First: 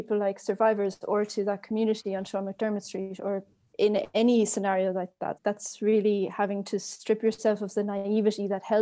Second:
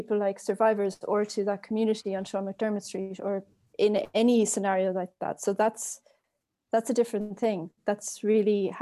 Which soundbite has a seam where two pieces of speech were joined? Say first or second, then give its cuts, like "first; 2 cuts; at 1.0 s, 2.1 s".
first; 1 cut; at 5.4 s